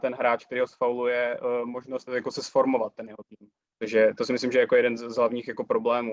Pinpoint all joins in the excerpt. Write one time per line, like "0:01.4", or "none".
0:02.1
0:03.7

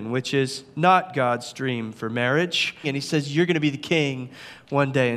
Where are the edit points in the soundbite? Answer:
0:02.8

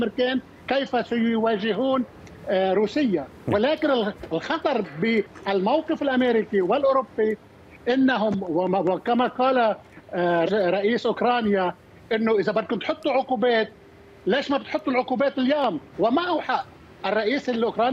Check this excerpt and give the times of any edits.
0:10.5
0:15.9

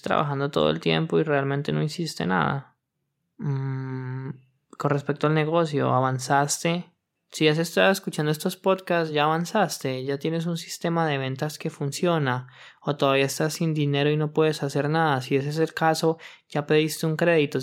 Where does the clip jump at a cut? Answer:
none

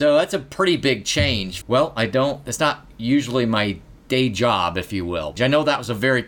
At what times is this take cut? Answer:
0:01.6
0:05.4

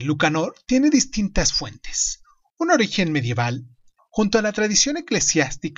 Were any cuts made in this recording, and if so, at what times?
0:04.0

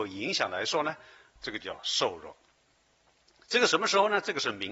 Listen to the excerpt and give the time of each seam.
0:01.4

